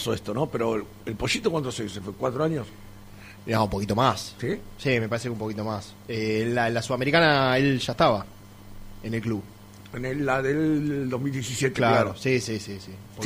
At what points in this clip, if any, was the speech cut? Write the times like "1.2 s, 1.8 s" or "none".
none